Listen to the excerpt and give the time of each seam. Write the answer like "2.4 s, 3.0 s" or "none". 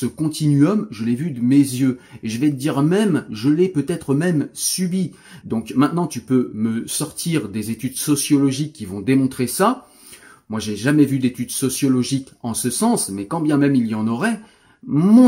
5.4 s